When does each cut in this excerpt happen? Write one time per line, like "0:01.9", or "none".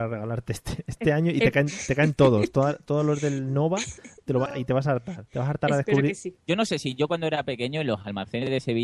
0:05.3
0:06.4